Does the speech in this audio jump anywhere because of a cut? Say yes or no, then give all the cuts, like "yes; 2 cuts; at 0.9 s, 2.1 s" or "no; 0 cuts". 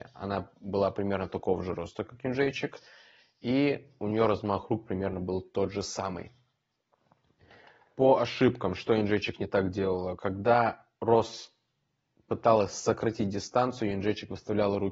no; 0 cuts